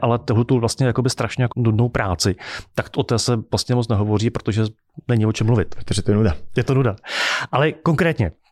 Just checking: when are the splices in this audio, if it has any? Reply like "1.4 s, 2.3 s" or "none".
1.5 s

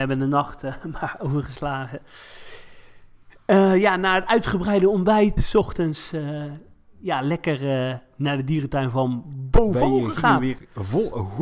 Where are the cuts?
5.4 s

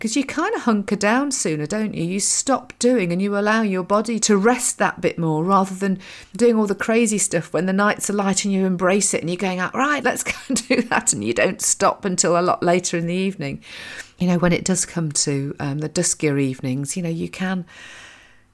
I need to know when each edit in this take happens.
10.0 s

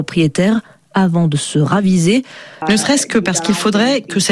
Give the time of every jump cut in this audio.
2.6 s

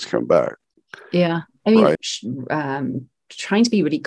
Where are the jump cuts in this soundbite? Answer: 1.9 s

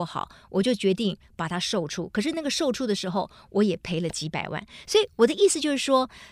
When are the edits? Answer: none

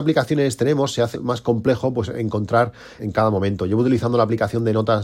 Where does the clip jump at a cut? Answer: 1.1 s, 3.0 s

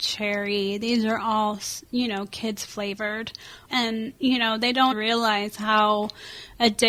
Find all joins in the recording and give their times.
3.7 s, 4.9 s

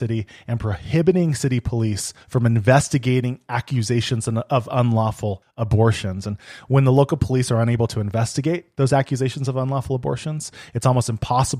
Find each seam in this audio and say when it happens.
none

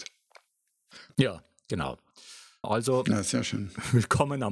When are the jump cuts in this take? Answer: 1.1 s, 2.6 s

